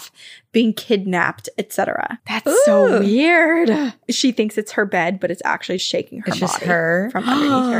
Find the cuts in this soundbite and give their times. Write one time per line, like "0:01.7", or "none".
0:02.2
0:05.8

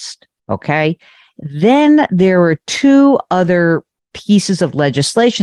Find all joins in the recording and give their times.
none

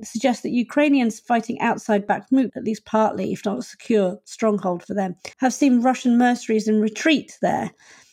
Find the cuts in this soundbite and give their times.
0:02.5
0:05.3

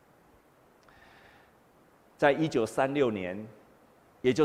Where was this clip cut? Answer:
none

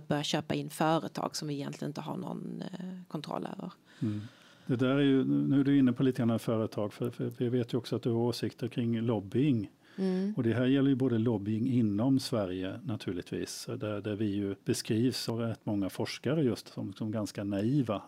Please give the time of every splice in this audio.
none

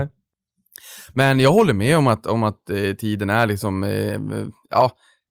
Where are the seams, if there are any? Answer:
none

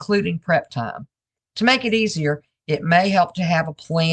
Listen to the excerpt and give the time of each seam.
0:01.4

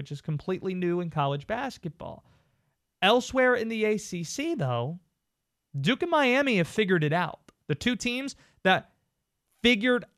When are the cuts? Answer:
0:07.6

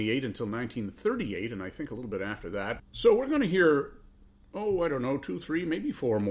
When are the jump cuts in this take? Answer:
0:02.8

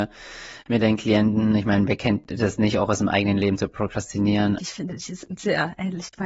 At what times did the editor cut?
0:04.6

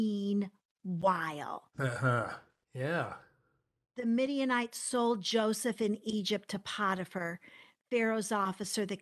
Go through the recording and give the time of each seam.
0:02.6

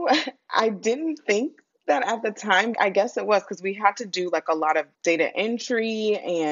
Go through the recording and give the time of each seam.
0:02.7
0:04.9

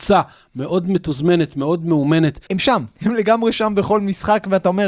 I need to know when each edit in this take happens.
0:02.5

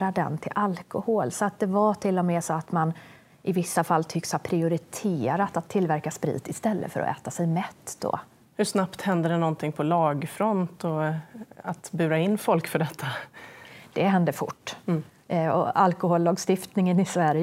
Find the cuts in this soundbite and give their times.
none

